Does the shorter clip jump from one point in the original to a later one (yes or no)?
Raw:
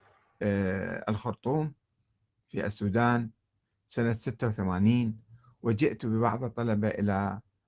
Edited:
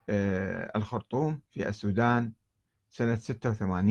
yes